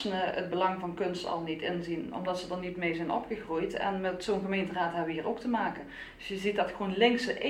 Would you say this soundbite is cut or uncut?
uncut